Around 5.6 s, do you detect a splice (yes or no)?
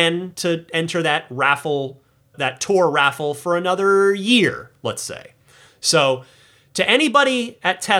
no